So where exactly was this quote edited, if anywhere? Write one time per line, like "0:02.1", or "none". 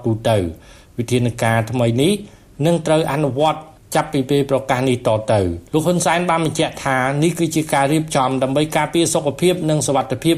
0:05.7